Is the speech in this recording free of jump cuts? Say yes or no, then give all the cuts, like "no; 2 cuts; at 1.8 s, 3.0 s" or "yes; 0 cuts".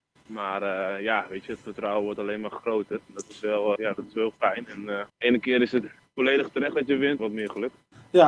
no; 3 cuts; at 3.8 s, 5.1 s, 7.2 s